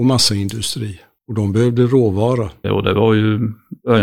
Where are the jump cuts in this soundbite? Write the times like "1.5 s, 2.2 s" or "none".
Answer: 2.6 s